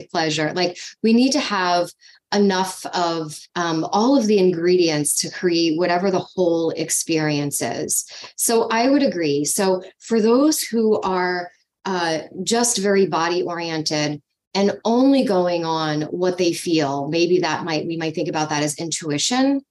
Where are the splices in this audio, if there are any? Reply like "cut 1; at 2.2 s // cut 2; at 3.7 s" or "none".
cut 1; at 3.5 s